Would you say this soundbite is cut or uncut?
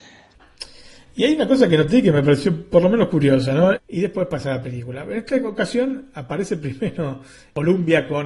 cut